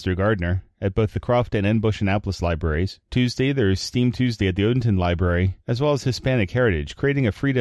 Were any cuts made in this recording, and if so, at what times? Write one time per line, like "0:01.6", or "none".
0:03.1
0:05.6